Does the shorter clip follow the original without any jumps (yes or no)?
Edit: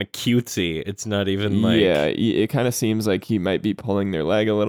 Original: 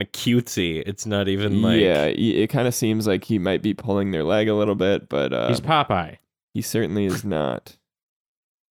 yes